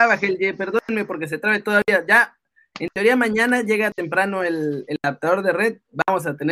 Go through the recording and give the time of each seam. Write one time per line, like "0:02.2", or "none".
none